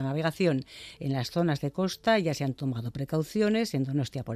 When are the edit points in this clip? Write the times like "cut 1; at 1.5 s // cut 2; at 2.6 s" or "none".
cut 1; at 1.0 s